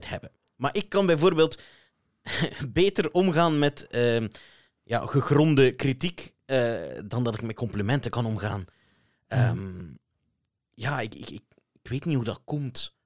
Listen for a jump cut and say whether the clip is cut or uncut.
uncut